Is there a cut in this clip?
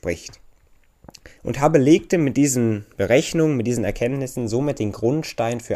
yes; 1 cut; at 1.4 s

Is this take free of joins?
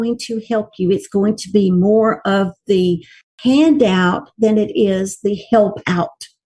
yes; 0 cuts

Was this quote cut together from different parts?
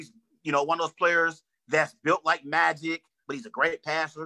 yes; 1 cut; at 3.2 s

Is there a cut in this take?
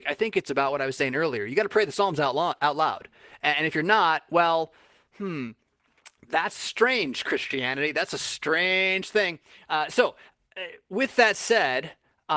no; 0 cuts

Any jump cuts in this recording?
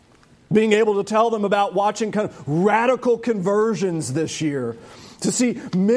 no; 0 cuts

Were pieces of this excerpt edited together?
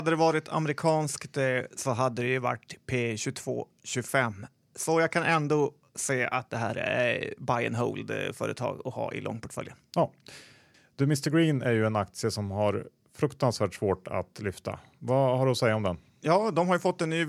no; 0 cuts

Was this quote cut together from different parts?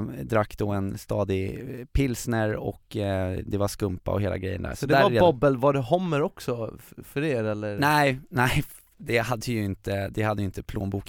no; 0 cuts

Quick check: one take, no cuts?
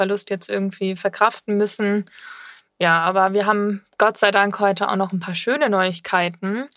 yes; 0 cuts

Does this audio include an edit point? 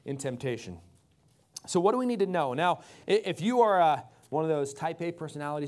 no; 0 cuts

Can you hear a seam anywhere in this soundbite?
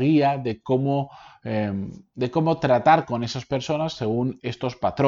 no; 0 cuts

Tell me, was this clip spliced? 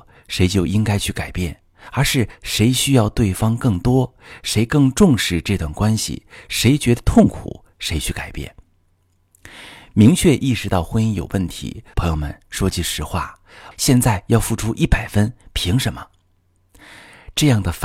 yes; 2 cuts; at 11.9 s, 13.7 s

